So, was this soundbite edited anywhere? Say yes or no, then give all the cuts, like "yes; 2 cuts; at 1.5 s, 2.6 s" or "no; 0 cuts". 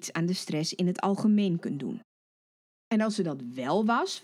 yes; 1 cut; at 2.7 s